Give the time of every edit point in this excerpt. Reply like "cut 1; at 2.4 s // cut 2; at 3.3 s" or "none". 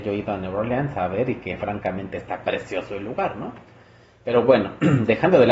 none